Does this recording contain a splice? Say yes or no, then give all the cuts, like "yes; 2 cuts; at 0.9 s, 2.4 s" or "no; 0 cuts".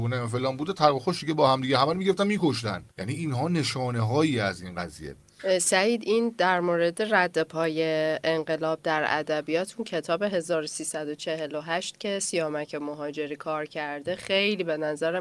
yes; 1 cut; at 2.9 s